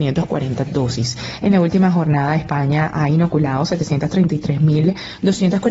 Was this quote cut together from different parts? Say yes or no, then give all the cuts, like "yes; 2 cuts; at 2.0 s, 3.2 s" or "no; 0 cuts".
yes; 1 cut; at 1.4 s